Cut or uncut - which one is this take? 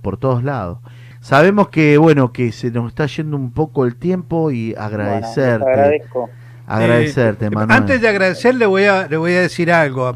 cut